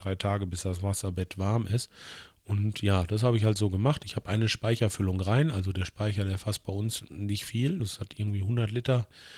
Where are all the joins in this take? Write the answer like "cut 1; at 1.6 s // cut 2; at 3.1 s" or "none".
cut 1; at 7.8 s

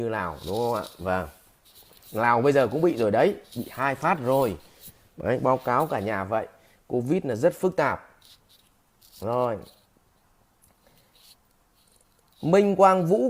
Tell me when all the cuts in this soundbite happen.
none

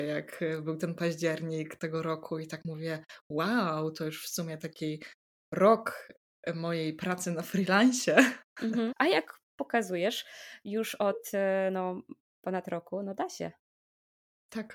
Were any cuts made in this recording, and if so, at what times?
cut 1; at 8.9 s

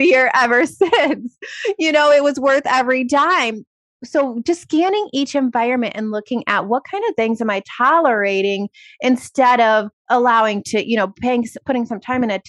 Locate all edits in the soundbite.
cut 1; at 10.0 s

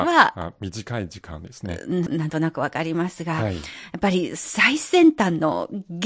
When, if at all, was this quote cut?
cut 1; at 2.1 s

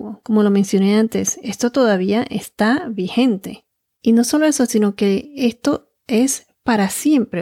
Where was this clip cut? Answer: none

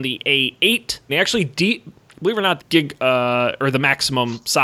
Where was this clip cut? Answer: cut 1; at 1.1 s // cut 2; at 2.6 s

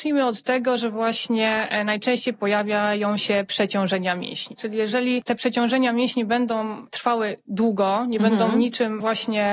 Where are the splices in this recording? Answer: cut 1; at 4.6 s

